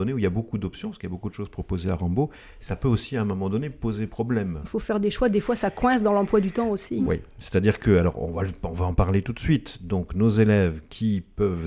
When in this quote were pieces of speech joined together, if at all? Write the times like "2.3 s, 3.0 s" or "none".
none